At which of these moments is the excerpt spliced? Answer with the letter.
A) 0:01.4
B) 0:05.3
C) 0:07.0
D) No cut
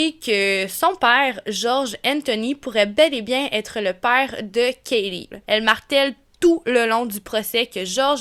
B